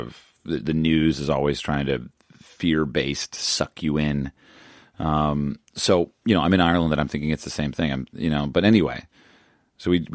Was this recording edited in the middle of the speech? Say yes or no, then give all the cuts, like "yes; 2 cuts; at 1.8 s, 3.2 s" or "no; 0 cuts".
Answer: no; 0 cuts